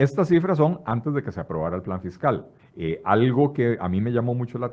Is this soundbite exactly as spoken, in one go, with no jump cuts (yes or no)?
no